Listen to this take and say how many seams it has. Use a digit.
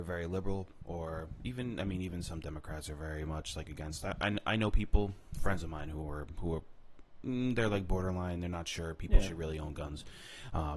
0